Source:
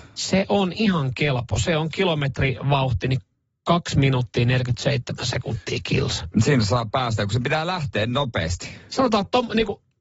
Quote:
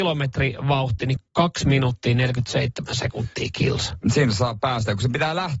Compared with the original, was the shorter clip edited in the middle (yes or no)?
yes